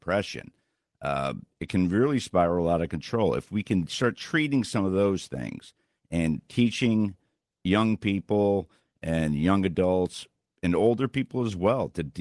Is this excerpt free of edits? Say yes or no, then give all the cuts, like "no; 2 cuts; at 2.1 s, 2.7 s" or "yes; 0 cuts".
yes; 0 cuts